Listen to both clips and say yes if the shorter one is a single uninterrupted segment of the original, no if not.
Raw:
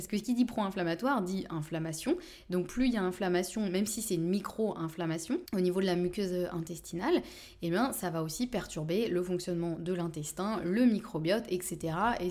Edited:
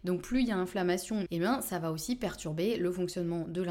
no